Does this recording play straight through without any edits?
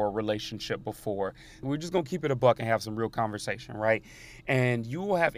no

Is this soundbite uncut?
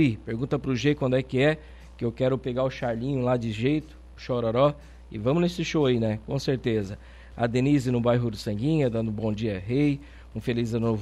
yes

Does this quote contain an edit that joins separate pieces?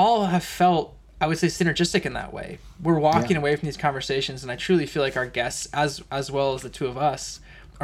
no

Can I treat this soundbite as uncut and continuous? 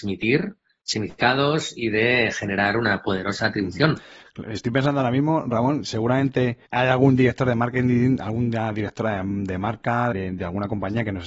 no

